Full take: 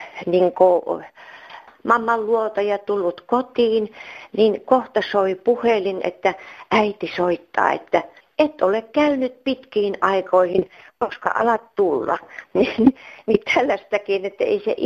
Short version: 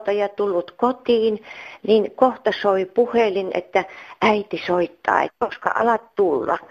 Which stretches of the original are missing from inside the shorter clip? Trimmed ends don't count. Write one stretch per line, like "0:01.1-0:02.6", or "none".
0:07.7-0:10.8